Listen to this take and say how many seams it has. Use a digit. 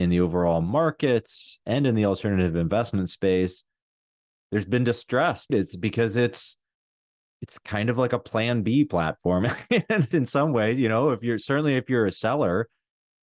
1